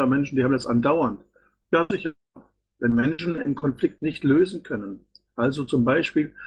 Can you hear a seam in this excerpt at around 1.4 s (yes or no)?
no